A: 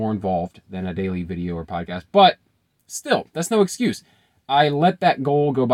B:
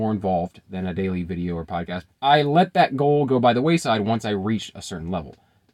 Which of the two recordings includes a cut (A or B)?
B